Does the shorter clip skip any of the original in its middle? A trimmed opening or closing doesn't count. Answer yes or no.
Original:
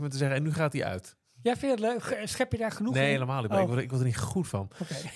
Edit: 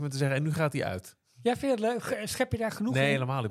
no